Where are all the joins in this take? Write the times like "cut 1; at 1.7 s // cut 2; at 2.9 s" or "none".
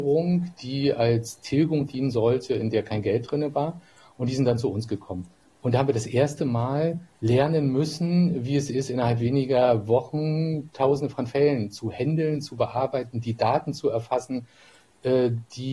cut 1; at 7.1 s

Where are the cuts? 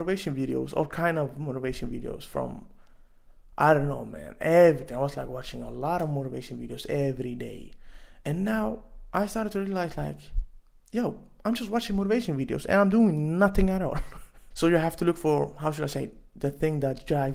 cut 1; at 14.5 s

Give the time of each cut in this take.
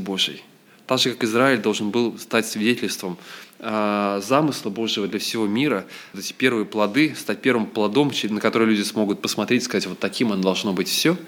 cut 1; at 6.1 s

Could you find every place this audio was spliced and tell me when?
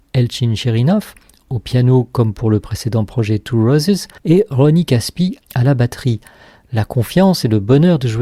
cut 1; at 4.2 s // cut 2; at 5.4 s

